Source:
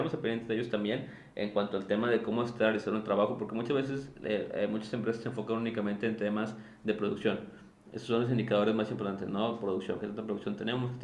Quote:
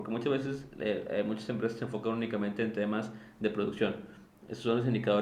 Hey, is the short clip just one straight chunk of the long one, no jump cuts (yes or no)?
yes